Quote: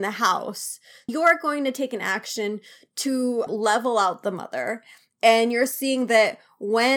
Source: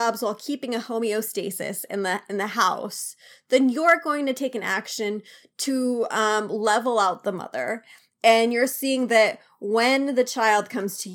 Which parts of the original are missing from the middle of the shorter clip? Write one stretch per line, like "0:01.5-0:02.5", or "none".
0:03.4-0:03.7
0:06.1-0:06.5

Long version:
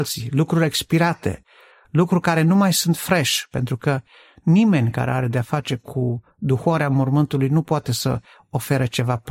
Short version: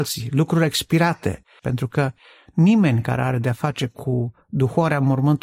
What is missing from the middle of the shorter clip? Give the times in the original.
0:01.6-0:03.5

